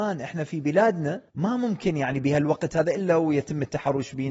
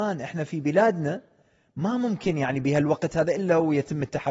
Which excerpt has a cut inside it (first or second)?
first